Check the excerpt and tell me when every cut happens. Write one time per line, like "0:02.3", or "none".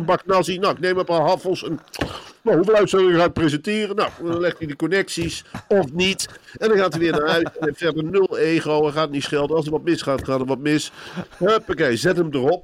none